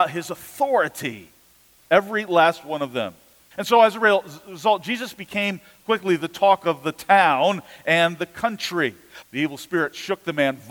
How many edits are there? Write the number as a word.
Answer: two